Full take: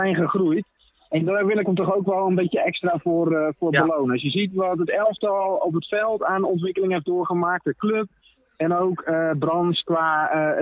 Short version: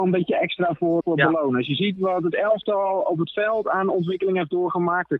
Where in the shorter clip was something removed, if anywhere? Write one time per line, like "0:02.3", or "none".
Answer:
0:01.0